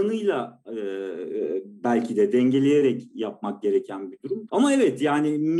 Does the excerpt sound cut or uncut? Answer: cut